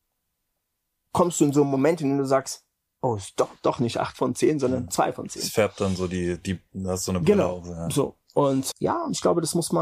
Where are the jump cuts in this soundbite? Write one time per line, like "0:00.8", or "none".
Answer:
0:08.7